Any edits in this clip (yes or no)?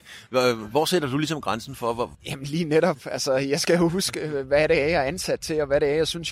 yes